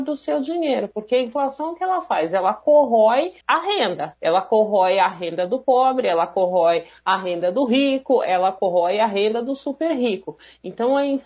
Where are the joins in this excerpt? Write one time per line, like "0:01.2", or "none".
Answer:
0:03.4